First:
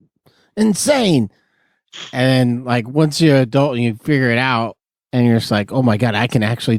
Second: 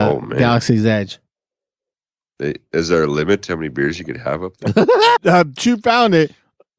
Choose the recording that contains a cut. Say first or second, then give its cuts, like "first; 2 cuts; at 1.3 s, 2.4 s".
second; 1 cut; at 5.2 s